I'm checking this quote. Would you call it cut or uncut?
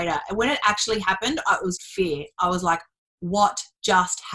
cut